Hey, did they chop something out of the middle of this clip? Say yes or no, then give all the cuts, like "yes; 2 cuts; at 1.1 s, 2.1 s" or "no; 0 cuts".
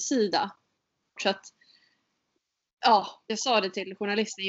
yes; 2 cuts; at 1.2 s, 3.3 s